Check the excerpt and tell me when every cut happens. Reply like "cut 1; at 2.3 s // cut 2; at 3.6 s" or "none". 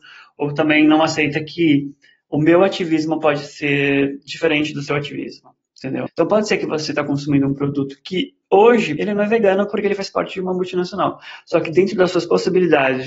cut 1; at 6.1 s // cut 2; at 9.0 s